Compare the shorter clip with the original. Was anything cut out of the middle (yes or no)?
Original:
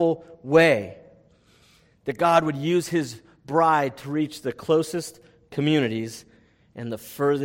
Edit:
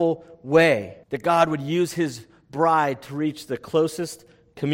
yes